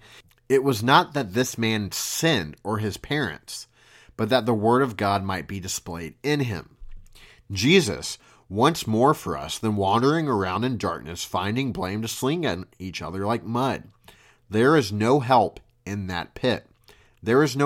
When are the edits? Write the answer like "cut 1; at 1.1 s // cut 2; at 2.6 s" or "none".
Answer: none